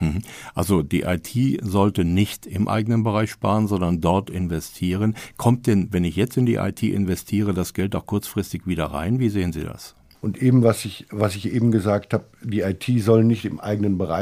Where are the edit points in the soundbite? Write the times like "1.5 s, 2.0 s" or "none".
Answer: 10.1 s